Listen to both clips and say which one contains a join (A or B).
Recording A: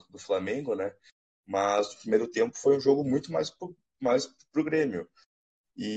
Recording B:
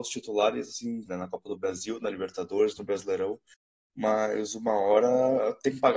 B